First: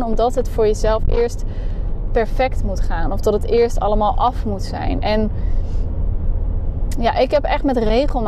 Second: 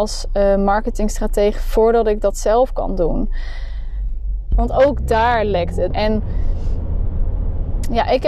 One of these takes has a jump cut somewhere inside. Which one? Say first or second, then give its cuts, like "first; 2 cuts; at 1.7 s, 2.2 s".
second; 2 cuts; at 4.5 s, 5.9 s